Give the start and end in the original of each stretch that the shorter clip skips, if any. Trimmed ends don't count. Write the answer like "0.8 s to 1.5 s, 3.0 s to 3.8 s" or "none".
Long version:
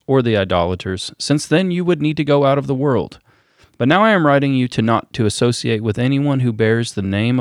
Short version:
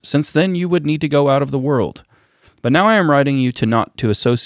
none